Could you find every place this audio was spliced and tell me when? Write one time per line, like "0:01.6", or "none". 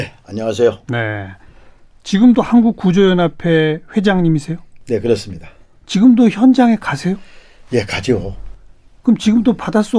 none